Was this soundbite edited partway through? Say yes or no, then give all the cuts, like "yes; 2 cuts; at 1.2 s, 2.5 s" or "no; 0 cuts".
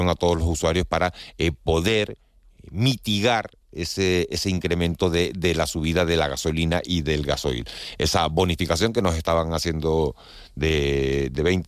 no; 0 cuts